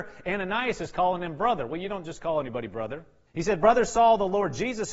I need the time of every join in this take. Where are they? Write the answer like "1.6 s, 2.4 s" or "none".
3.3 s